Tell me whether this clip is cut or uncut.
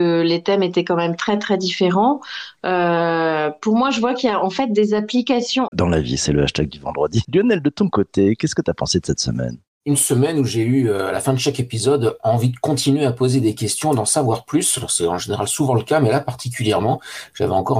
cut